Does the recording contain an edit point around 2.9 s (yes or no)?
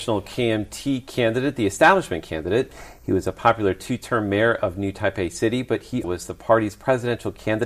no